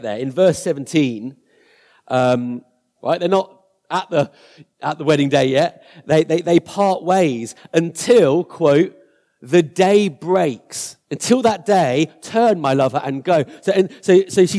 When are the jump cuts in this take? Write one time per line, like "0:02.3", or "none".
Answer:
0:03.0